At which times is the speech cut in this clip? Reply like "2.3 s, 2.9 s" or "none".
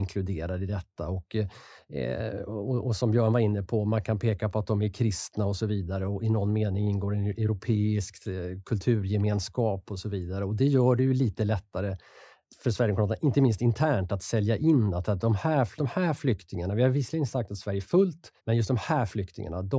15.8 s, 18.4 s